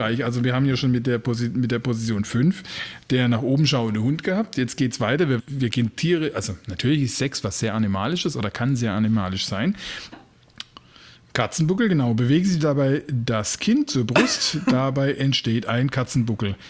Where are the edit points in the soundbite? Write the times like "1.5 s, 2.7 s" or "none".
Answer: 5.4 s, 10.1 s